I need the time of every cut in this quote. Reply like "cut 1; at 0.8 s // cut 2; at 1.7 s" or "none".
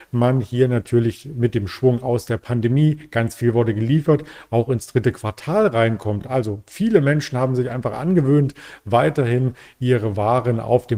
none

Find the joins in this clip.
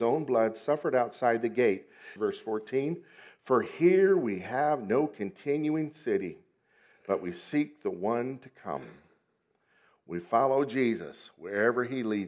cut 1; at 2.2 s

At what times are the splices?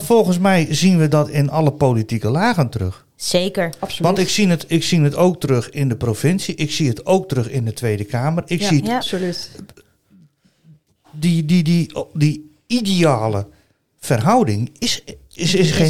cut 1; at 9.0 s

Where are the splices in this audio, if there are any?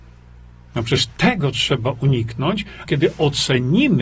cut 1; at 2.9 s

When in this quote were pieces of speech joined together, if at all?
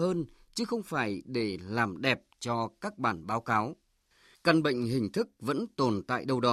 cut 1; at 4.3 s

